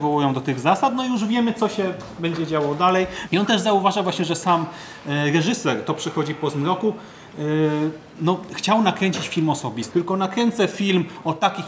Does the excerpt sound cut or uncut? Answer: cut